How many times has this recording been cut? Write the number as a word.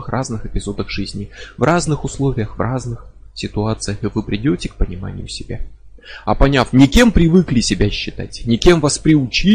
one